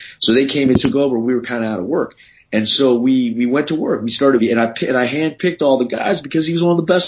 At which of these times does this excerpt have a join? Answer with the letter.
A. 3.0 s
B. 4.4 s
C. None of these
B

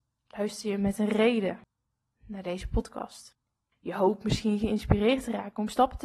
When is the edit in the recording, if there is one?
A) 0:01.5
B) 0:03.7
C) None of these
B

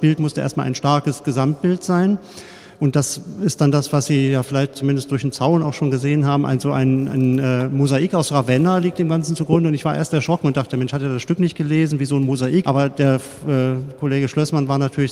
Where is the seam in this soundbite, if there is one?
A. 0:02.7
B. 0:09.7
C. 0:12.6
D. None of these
C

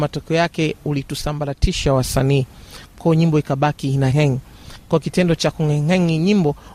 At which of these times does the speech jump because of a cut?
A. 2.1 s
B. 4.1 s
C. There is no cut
B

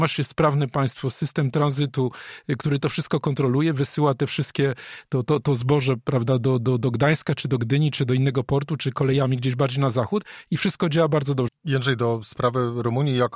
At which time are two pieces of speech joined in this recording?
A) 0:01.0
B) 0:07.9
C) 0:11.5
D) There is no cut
C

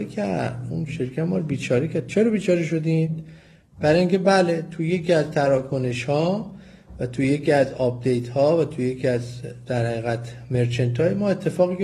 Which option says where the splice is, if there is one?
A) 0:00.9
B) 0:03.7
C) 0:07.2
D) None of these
D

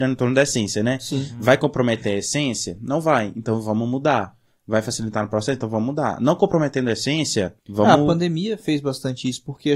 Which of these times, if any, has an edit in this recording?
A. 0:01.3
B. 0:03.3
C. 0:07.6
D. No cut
C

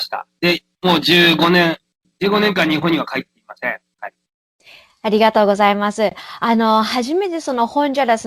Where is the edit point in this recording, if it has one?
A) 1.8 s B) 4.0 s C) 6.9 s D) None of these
B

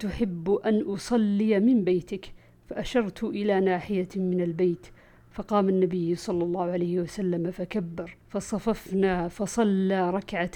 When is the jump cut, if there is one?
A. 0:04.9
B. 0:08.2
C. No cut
B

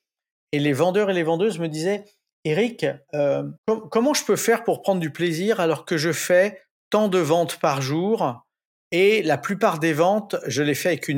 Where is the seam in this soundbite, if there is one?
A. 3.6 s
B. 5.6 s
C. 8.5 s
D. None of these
A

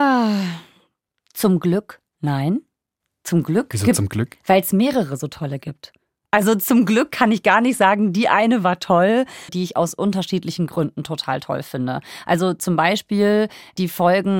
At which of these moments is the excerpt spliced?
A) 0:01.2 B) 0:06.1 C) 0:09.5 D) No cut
C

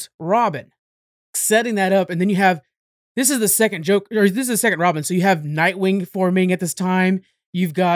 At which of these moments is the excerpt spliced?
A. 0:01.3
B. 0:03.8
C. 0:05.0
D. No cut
A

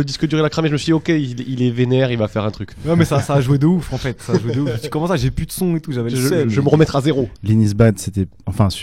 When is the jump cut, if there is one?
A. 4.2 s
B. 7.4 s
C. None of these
B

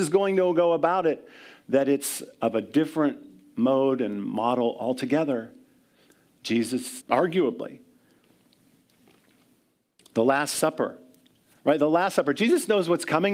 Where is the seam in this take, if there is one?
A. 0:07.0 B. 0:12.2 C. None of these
A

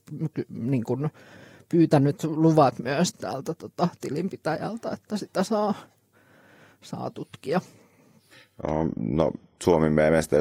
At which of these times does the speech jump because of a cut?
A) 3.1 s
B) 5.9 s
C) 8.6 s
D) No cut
A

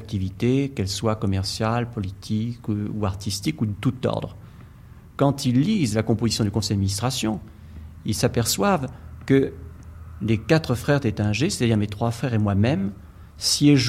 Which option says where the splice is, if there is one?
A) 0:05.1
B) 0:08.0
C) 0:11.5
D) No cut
D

